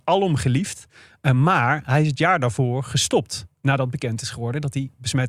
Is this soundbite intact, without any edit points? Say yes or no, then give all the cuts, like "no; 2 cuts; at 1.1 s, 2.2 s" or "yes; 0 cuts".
yes; 0 cuts